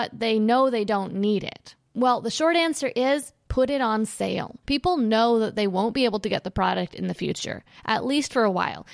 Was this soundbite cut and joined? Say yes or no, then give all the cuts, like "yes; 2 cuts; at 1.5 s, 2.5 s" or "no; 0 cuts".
yes; 1 cut; at 4.6 s